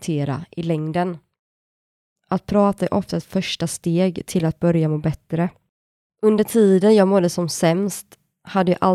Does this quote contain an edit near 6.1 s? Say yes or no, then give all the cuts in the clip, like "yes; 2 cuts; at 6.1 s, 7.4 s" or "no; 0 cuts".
yes; 2 cuts; at 2.2 s, 6.1 s